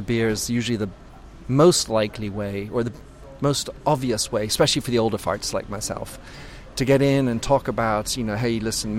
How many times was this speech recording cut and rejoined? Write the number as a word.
zero